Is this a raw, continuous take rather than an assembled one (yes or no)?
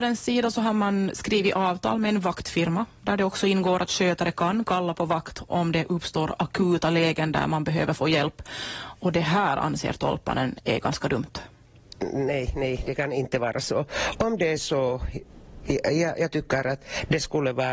yes